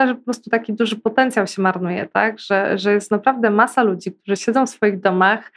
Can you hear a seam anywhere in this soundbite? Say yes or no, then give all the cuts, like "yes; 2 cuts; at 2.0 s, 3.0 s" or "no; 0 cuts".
no; 0 cuts